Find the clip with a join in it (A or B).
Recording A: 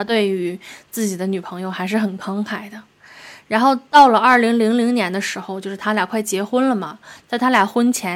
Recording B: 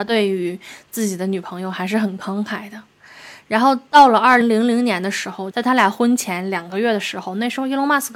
B